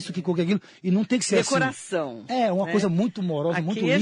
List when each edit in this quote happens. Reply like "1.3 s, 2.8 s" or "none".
none